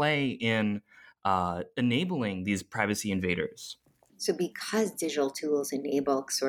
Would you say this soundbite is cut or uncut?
uncut